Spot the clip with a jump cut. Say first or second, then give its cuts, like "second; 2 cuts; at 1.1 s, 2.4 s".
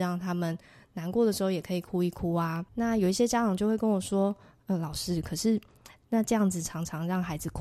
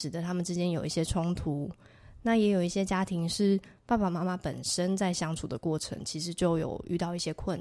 first; 1 cut; at 2.7 s